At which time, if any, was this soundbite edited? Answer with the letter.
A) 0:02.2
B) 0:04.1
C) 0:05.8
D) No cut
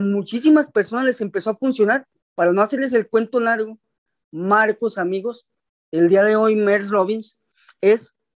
A